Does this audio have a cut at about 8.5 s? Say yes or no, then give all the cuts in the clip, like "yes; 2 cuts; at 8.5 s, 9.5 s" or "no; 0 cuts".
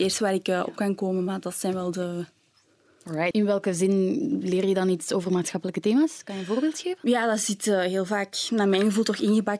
no; 1 cut; at 3.3 s